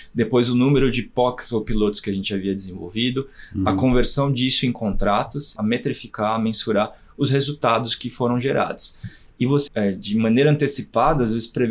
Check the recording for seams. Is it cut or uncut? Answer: cut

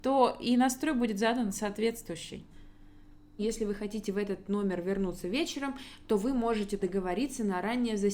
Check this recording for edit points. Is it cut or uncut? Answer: cut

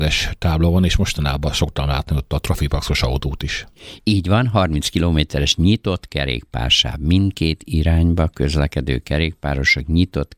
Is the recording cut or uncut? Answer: uncut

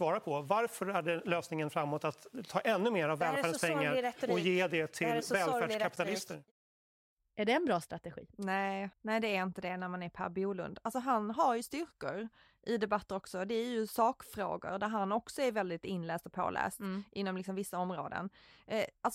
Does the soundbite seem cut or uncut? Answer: cut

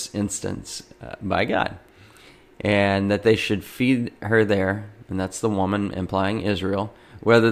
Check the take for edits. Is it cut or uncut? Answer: uncut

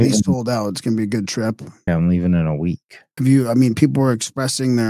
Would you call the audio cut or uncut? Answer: cut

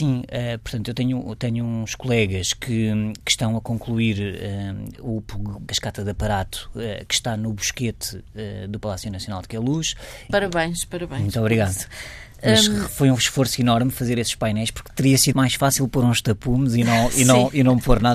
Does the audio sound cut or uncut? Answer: cut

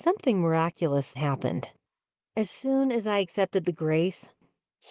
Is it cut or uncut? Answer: cut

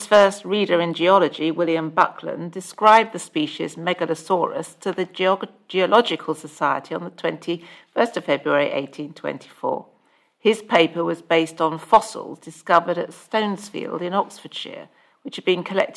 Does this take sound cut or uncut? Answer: uncut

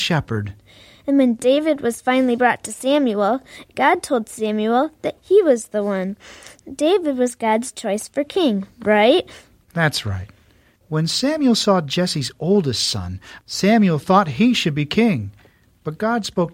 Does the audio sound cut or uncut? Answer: cut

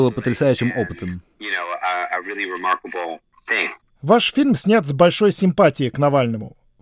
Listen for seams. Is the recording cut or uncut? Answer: uncut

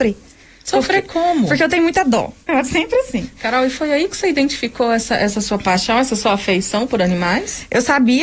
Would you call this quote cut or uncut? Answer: cut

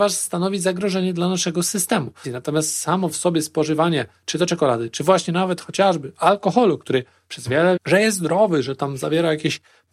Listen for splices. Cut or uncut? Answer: cut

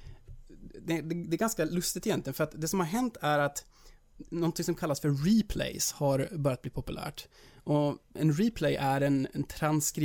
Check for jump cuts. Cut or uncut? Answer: uncut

